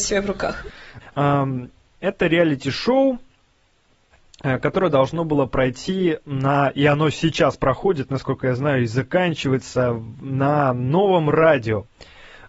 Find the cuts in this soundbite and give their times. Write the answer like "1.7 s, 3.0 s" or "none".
1.0 s